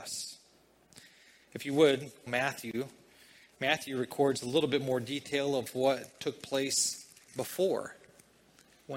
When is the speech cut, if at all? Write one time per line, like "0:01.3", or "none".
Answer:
0:02.3